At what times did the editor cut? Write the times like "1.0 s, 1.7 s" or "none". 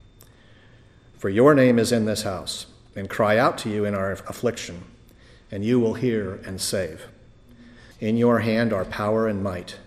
1.1 s, 7.9 s